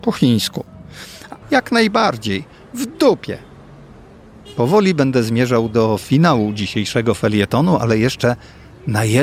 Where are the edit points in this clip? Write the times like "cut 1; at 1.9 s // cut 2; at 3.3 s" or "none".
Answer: cut 1; at 1.4 s